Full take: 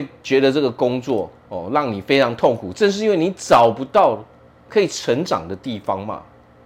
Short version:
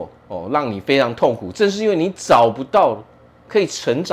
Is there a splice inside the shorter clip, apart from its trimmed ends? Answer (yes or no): no